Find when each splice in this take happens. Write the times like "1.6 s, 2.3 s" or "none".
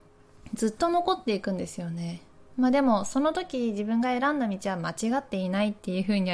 none